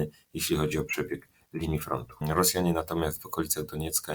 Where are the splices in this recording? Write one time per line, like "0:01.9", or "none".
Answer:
0:02.2

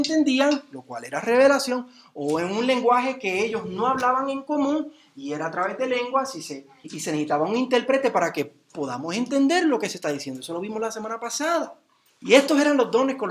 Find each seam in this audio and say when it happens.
0:06.8

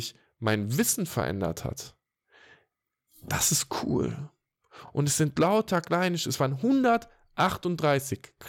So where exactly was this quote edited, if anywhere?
none

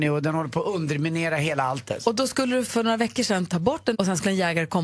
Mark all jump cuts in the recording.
0:02.7
0:03.9

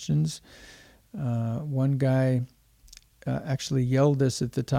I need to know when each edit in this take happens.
none

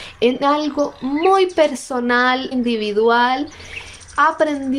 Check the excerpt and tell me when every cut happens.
0:02.5

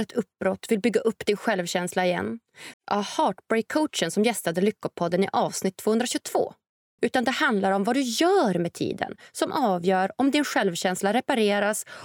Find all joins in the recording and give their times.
0:02.7
0:07.0

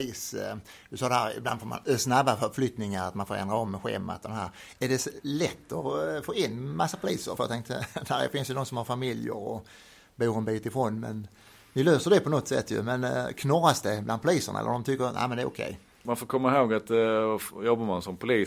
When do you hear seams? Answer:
none

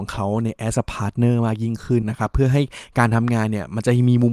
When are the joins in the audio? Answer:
0:02.0

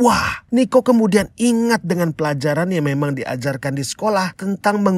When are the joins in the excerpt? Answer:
none

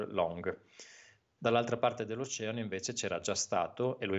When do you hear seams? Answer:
0:01.4

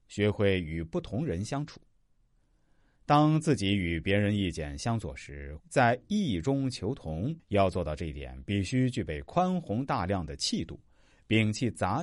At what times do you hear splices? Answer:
0:05.6
0:07.4

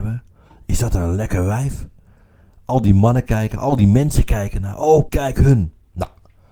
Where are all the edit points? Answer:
0:05.1

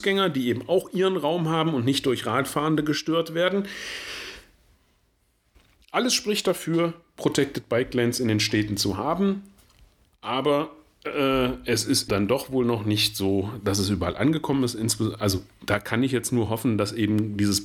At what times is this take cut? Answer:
0:12.1

